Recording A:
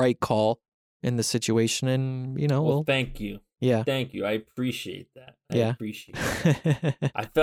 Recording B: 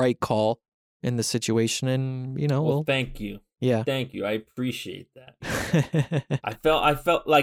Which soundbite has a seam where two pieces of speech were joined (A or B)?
B